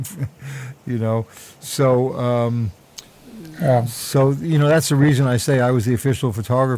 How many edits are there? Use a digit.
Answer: 0